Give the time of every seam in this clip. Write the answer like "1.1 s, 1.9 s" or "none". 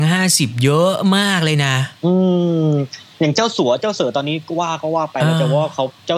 2.0 s